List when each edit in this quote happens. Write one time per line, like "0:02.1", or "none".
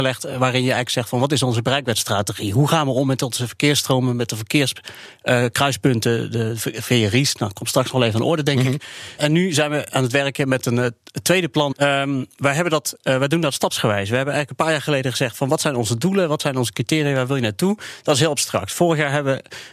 0:09.2
0:11.7